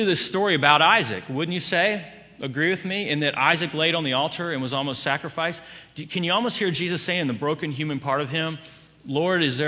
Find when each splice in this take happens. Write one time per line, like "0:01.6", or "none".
none